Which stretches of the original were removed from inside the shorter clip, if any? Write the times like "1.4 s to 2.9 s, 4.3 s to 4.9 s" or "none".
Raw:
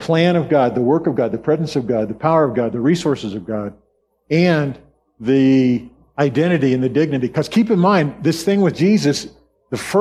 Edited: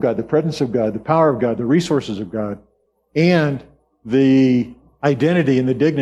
none